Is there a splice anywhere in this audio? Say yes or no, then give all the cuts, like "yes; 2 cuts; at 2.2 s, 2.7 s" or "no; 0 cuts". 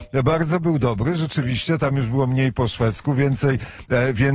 no; 0 cuts